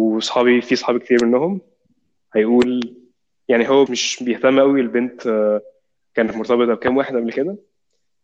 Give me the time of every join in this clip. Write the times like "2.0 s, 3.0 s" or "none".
3.9 s